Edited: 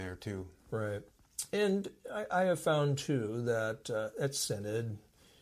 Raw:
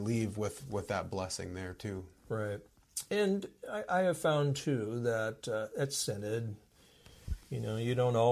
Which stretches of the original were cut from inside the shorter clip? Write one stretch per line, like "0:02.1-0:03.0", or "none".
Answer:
none